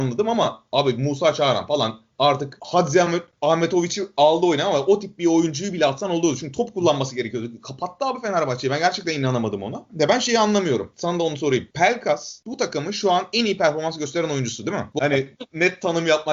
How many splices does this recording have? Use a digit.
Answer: 2